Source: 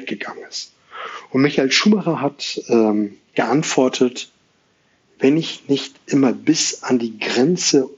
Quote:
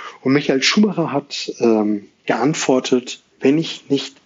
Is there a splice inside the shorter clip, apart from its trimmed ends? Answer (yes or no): yes